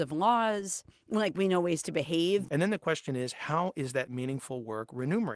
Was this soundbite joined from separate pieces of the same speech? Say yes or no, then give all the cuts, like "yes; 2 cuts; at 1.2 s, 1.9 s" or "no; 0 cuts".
yes; 1 cut; at 2.5 s